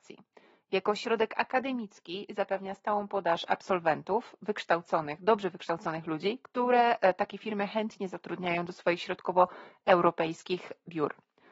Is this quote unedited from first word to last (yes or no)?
yes